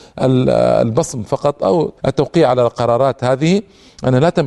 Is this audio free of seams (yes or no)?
no